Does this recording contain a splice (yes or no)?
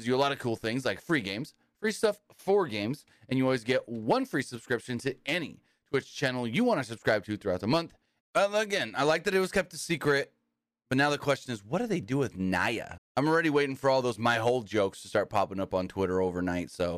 yes